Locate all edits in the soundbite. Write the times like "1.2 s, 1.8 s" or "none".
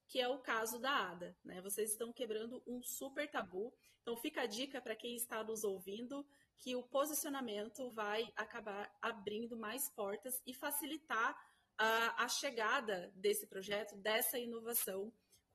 7.9 s